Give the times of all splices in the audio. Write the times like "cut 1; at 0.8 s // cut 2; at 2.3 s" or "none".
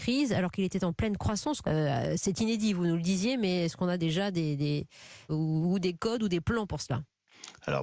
cut 1; at 1.6 s // cut 2; at 5.3 s